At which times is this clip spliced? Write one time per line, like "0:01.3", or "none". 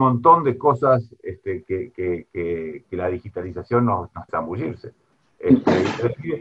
0:04.3